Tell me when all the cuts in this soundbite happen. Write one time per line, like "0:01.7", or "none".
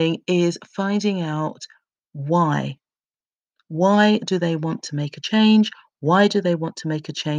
none